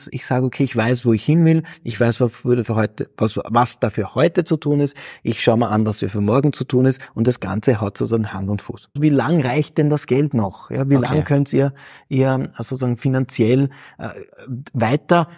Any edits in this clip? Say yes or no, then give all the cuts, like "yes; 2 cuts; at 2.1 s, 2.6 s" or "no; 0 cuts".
yes; 1 cut; at 9.0 s